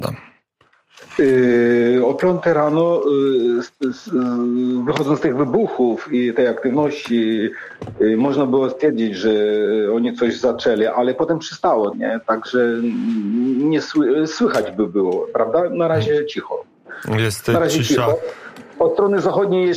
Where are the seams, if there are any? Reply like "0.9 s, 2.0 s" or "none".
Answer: 11.9 s